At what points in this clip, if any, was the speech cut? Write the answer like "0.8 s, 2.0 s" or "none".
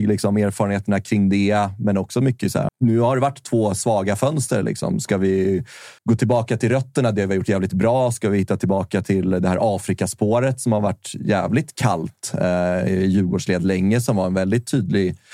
2.7 s, 6.0 s

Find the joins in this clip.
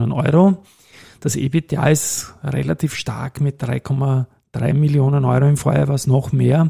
none

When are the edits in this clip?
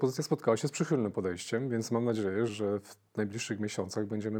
2.5 s

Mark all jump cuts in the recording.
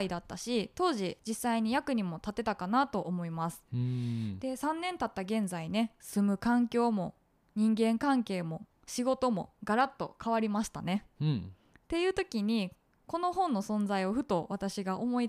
none

